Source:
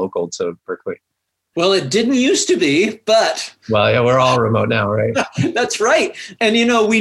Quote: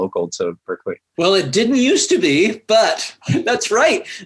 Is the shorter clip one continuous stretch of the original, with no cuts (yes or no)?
no